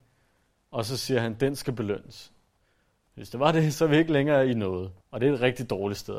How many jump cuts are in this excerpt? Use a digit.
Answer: 1